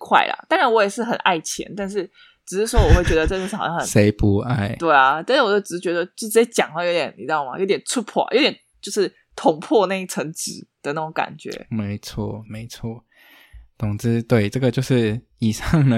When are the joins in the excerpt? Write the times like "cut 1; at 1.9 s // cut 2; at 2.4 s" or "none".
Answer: none

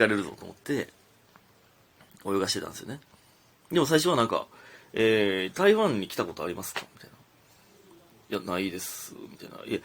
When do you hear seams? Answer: none

